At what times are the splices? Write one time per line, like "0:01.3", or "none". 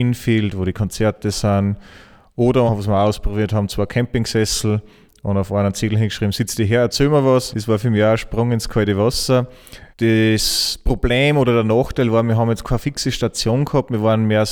0:02.7
0:07.5
0:09.9